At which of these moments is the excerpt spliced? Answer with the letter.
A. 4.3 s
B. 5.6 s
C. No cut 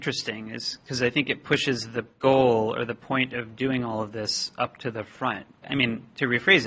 B